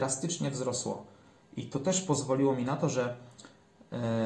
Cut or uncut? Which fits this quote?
uncut